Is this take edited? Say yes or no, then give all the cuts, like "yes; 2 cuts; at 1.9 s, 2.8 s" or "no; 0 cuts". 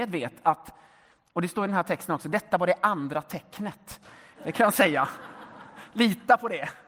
yes; 1 cut; at 4.3 s